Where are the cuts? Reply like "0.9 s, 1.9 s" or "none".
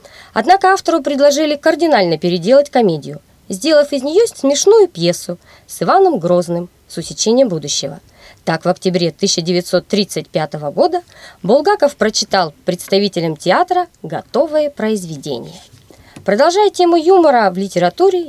none